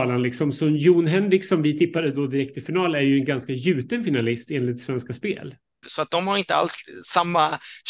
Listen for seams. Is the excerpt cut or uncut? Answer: cut